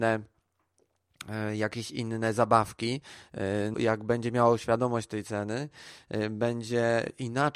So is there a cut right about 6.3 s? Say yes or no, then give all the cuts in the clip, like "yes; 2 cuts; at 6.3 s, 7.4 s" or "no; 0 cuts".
no; 1 cut; at 3.7 s